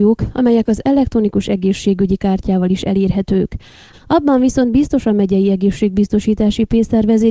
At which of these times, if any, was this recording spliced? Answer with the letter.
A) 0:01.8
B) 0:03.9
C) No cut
B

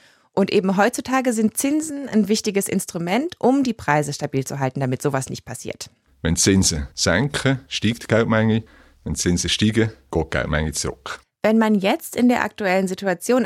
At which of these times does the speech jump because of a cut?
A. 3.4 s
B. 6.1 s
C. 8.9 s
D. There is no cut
B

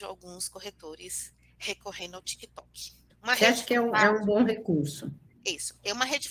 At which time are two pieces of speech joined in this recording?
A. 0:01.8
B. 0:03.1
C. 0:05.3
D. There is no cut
B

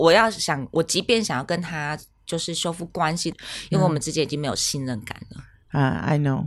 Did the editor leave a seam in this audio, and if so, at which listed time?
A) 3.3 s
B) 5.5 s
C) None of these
A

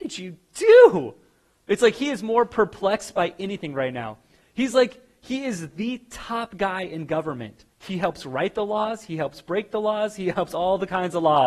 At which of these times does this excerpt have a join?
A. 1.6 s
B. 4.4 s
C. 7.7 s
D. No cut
C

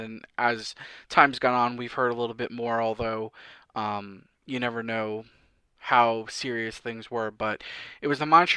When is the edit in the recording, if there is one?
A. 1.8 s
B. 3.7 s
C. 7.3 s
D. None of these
D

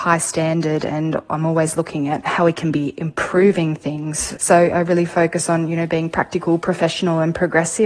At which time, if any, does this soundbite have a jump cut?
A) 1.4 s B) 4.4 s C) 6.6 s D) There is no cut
B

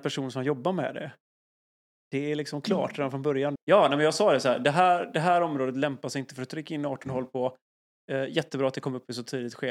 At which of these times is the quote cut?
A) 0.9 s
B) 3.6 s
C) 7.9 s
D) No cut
B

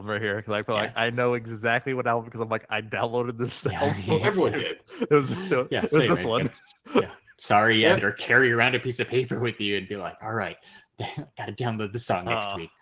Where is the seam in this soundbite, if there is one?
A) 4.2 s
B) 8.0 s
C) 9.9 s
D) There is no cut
B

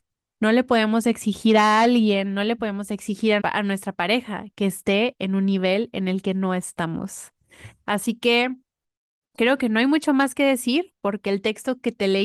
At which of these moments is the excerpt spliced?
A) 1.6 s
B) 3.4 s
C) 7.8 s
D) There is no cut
B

